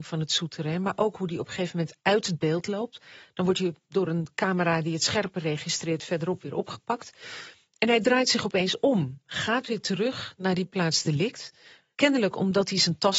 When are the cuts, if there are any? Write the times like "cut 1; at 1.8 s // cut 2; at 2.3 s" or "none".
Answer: none